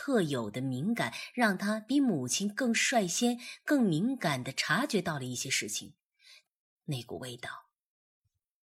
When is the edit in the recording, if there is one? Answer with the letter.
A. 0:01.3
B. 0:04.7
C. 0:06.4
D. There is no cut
C